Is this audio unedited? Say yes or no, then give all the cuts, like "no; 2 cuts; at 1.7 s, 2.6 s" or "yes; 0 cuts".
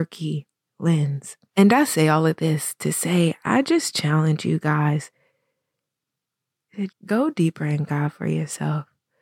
no; 2 cuts; at 1.5 s, 6.9 s